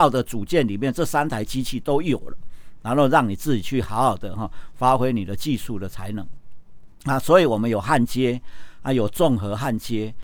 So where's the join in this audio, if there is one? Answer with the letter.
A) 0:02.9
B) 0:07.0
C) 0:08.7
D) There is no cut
D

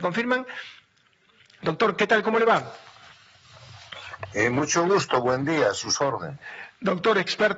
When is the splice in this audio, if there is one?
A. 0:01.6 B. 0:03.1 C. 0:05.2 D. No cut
A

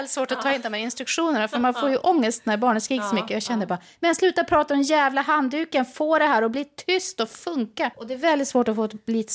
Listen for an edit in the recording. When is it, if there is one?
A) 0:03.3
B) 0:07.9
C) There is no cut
B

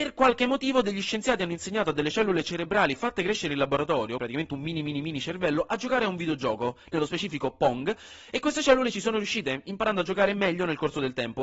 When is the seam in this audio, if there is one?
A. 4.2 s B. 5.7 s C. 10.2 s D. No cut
A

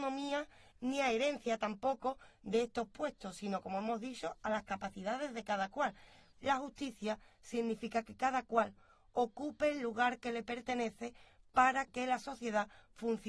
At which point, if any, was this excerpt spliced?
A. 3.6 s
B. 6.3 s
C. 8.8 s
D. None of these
B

